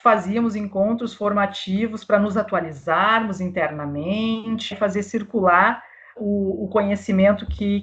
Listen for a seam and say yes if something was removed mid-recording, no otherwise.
yes